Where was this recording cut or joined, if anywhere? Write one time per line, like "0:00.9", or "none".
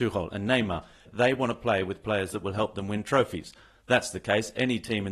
0:01.1